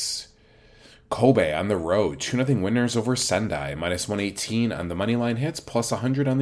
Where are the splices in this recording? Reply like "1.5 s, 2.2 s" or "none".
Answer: none